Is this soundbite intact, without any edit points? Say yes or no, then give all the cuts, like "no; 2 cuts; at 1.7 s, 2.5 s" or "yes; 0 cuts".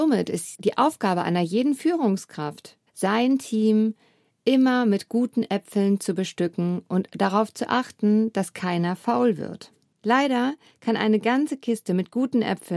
no; 2 cuts; at 2.9 s, 9.9 s